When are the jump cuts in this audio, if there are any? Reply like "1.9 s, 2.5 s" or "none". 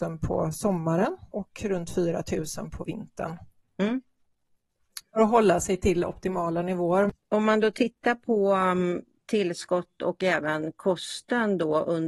1.3 s, 7.2 s